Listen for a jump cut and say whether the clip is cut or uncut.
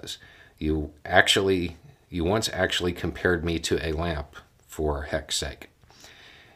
uncut